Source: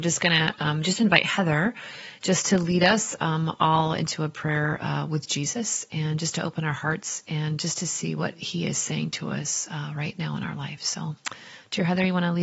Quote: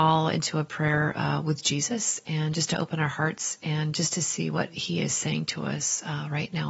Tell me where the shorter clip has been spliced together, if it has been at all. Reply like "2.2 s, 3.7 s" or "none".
none